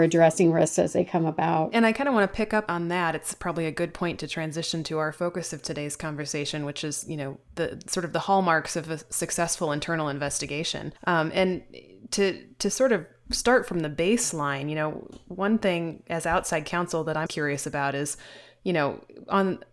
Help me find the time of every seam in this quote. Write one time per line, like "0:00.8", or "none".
0:11.0
0:17.3